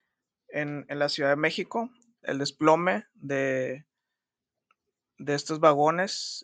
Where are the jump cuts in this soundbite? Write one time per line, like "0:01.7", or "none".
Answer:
0:02.2